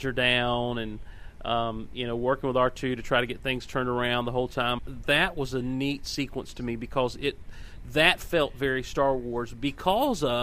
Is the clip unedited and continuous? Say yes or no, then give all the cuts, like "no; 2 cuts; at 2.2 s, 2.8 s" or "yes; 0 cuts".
no; 1 cut; at 4.8 s